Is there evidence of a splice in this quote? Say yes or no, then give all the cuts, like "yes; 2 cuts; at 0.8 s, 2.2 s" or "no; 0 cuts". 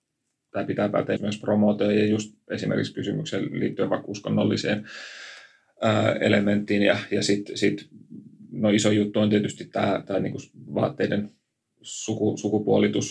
yes; 1 cut; at 1.2 s